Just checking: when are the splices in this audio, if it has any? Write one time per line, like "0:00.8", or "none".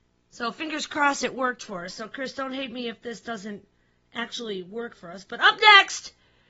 none